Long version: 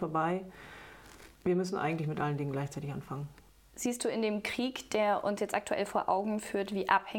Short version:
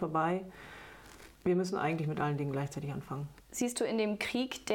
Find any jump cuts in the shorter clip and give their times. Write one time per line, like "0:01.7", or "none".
0:03.4